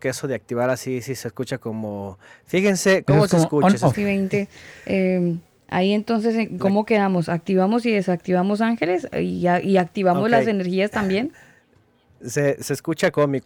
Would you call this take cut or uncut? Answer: cut